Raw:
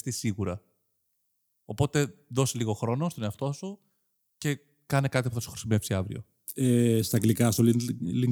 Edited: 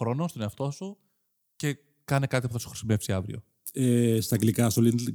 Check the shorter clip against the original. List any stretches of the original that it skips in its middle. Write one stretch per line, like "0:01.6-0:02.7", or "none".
none